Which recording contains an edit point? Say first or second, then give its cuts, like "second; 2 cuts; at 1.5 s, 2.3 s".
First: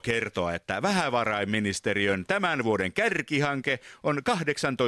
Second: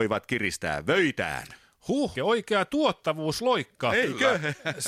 second; 1 cut; at 2.1 s